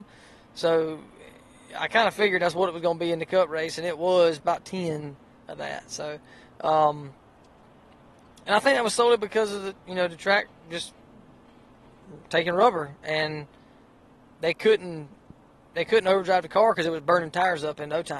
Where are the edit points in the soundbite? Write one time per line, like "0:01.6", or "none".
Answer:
0:04.4

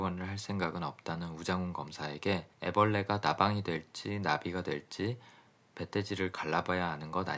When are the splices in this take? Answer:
0:02.5

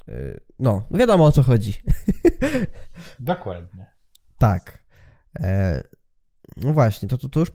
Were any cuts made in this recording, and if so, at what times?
none

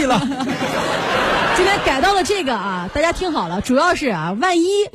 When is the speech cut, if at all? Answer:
none

